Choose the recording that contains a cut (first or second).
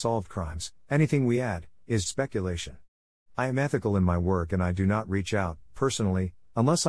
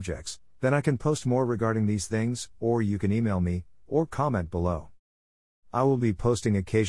first